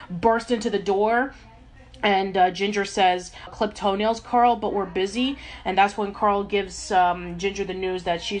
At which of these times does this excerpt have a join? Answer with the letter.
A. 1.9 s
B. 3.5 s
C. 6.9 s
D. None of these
B